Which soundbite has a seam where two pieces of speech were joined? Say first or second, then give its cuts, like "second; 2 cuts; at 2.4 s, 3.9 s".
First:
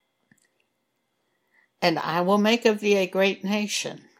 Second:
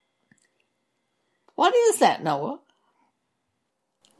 second; 1 cut; at 1.4 s